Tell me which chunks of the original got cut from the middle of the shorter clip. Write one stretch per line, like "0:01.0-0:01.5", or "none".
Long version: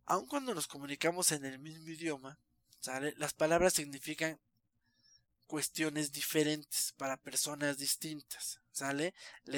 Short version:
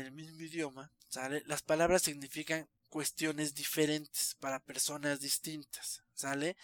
0:02.5-0:02.7
0:04.5-0:05.3